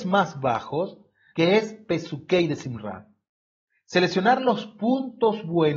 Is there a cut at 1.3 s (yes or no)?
yes